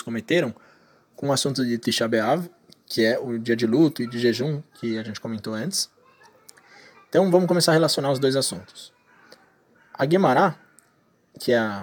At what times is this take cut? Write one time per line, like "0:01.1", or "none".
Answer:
none

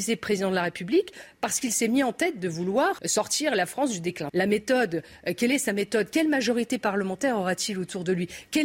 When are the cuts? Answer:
0:03.0
0:04.3

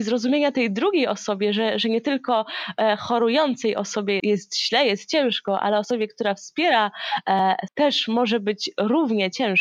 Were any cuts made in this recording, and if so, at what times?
0:04.2
0:07.7

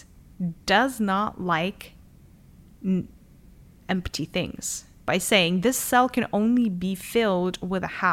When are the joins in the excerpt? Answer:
0:05.0

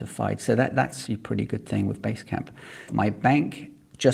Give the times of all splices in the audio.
0:01.1
0:02.9

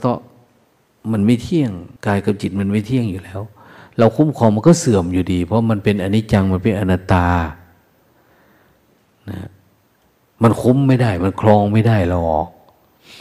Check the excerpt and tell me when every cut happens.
0:02.0

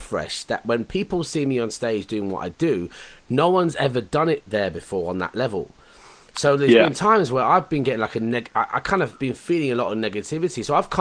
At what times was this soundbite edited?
none

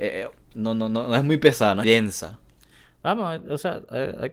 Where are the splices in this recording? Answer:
0:01.8

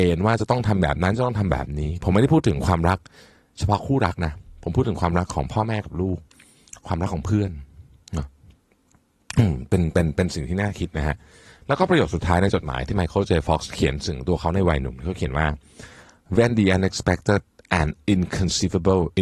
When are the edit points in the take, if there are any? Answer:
none

